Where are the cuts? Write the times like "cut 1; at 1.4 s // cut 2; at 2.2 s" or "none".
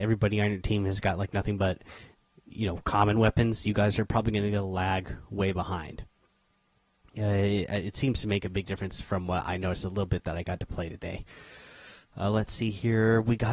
none